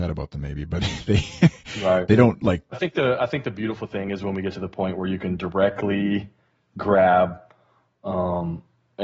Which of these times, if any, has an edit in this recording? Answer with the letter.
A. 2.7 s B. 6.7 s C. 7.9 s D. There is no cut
A